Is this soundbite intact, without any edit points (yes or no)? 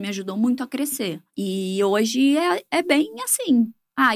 no